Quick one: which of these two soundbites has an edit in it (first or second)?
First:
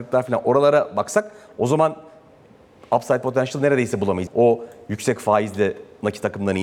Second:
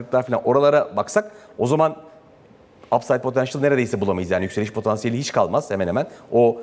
first